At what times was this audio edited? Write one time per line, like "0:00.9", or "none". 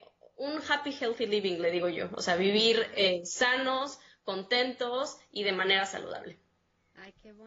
none